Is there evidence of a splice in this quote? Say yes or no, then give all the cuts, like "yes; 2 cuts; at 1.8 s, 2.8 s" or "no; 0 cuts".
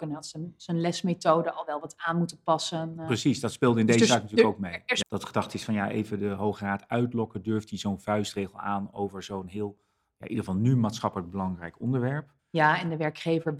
yes; 2 cuts; at 5.0 s, 12.4 s